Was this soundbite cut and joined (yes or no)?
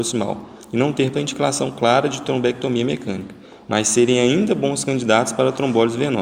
yes